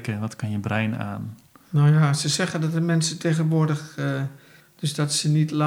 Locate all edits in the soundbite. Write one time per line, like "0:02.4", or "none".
0:04.6